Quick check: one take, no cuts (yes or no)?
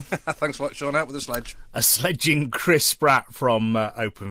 yes